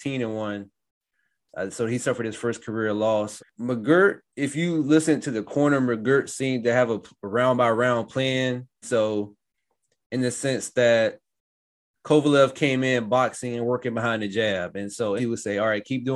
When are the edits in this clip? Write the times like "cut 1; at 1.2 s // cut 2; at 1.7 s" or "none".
cut 1; at 3.4 s // cut 2; at 8.8 s // cut 3; at 15.2 s